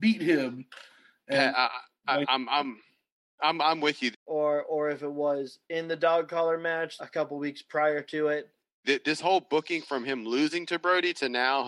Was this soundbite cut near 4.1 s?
yes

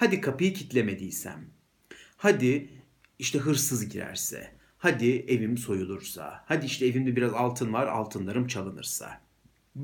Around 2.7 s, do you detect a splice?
no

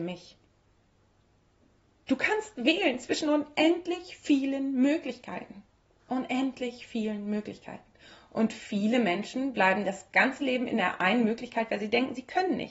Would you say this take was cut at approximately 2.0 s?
yes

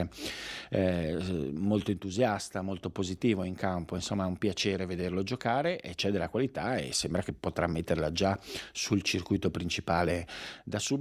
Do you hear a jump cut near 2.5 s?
no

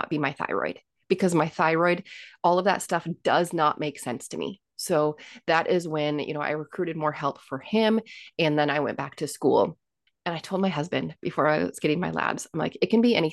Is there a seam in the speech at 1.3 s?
no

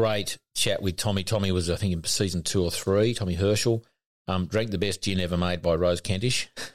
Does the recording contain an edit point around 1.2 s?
no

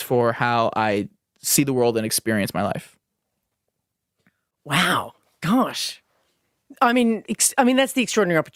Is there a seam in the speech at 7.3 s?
yes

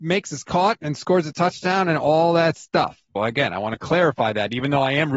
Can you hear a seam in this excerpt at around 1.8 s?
no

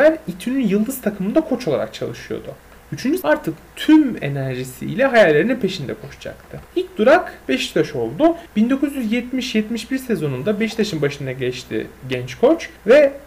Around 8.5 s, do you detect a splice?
no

